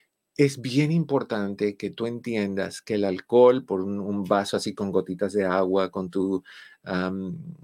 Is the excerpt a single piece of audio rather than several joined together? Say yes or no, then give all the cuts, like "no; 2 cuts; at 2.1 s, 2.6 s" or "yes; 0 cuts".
no; 2 cuts; at 3.7 s, 5.9 s